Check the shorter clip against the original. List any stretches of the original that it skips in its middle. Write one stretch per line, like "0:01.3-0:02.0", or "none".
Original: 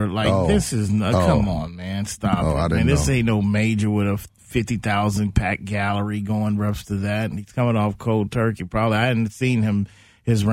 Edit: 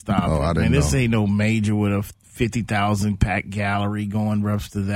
none